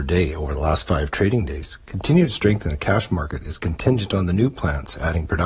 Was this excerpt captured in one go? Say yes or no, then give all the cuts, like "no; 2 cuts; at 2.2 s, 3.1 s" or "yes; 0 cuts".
yes; 0 cuts